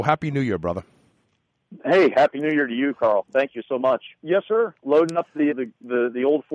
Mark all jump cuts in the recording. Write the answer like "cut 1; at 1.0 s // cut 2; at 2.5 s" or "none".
cut 1; at 4.2 s // cut 2; at 5.5 s